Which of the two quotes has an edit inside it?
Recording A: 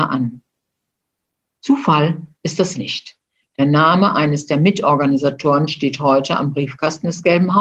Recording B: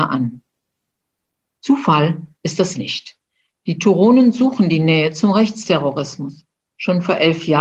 A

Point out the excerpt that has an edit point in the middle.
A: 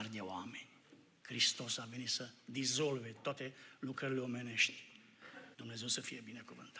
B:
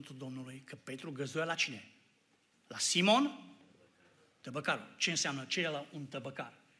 A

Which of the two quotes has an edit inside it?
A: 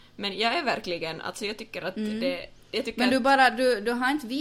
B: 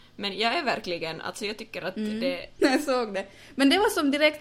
B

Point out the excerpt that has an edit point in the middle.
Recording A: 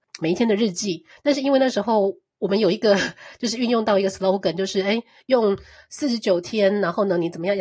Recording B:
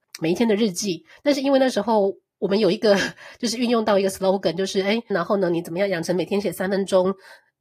B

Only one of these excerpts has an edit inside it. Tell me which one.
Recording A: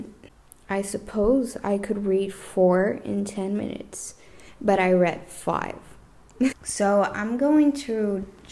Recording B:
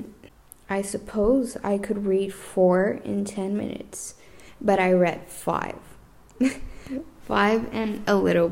A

